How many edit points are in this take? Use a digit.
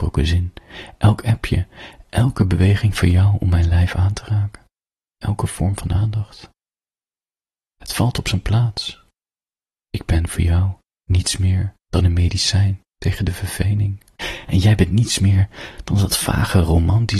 0